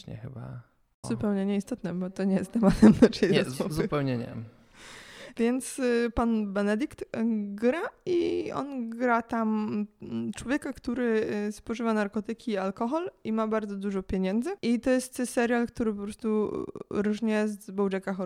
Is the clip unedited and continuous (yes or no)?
no